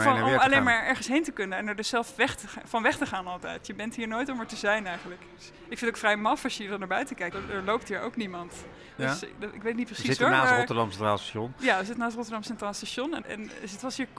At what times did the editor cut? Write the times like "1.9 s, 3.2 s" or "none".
7.3 s, 9.0 s, 13.2 s